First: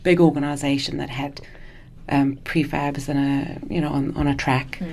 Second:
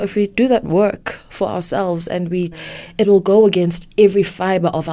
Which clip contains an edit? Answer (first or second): second